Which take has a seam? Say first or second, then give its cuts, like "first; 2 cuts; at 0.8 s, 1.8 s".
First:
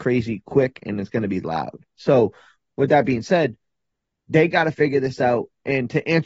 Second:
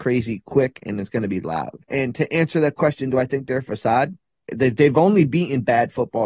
second; 2 cuts; at 1.8 s, 4.5 s